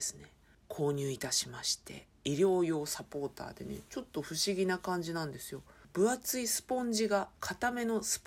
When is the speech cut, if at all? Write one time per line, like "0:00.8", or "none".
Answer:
none